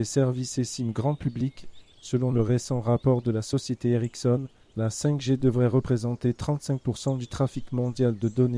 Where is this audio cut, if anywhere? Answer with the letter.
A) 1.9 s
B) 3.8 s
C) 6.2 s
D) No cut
A